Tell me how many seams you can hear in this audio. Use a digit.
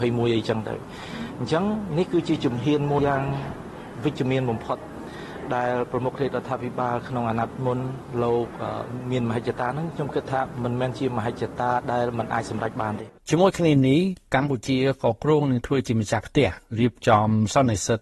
2